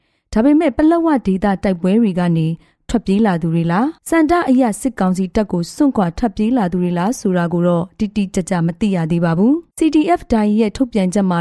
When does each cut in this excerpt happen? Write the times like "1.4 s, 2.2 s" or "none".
4.0 s, 9.7 s